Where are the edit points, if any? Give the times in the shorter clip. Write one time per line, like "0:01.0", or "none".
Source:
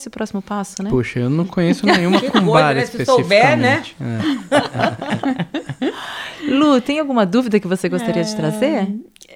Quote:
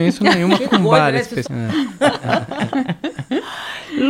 0:01.4

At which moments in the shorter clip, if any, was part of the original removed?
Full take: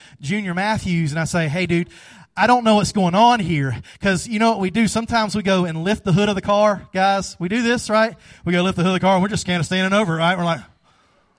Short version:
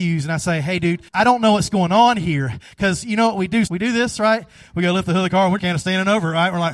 0:01.1
0:03.7
0:05.6

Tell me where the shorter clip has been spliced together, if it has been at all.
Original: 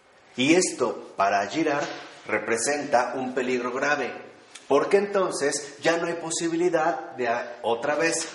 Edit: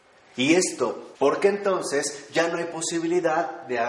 0:01.1

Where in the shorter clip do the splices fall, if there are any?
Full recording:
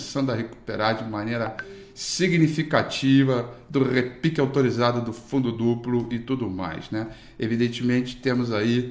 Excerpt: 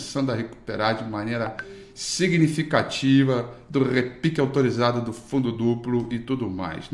none

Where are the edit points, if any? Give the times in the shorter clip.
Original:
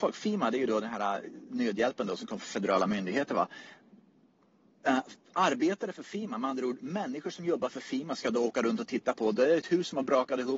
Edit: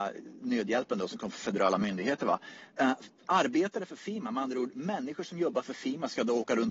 0:02.7

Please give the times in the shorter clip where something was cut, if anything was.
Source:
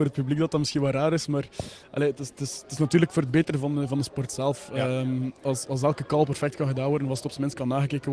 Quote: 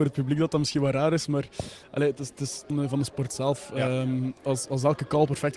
0:02.7

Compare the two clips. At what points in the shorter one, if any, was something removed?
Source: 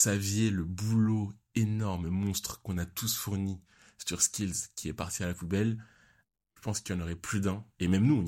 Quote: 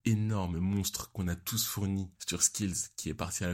0:02.2

